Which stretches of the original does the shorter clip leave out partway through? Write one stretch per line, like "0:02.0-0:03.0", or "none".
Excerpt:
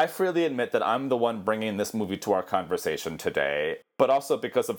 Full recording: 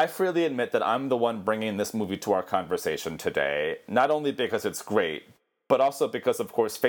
0:03.8-0:05.5